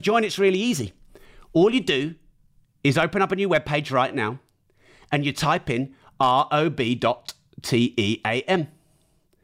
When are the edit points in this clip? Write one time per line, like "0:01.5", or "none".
none